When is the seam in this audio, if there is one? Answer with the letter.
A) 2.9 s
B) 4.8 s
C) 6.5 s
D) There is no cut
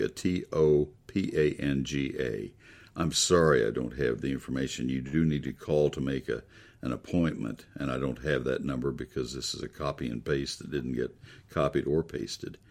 D